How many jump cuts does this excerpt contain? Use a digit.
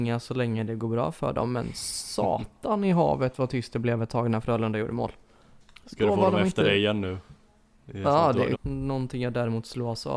1